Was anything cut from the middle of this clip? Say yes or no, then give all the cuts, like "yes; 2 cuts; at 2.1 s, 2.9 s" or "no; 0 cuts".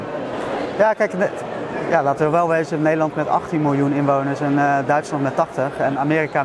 no; 0 cuts